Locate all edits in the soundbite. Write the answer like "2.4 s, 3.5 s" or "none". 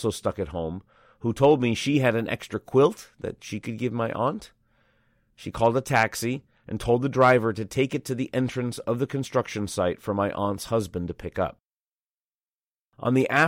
none